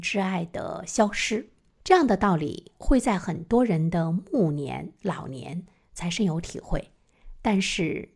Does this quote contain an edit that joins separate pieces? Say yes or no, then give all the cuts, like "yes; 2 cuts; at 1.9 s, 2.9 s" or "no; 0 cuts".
no; 0 cuts